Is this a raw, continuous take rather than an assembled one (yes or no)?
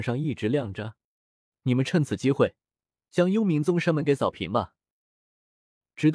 no